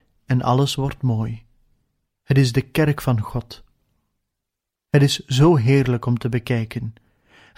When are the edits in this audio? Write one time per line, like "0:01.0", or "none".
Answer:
none